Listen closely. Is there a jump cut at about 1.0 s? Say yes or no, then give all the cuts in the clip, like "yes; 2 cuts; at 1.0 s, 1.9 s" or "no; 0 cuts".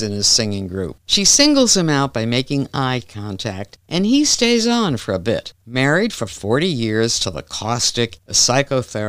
yes; 2 cuts; at 1.0 s, 8.2 s